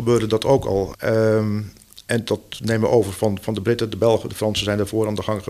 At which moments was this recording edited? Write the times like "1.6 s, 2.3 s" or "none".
0.9 s